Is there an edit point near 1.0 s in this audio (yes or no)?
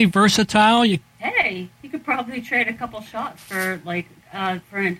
yes